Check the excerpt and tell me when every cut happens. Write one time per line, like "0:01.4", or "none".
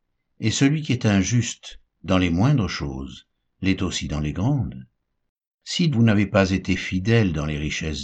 0:05.9